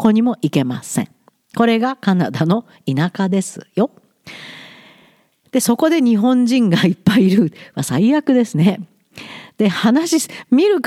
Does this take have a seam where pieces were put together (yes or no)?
no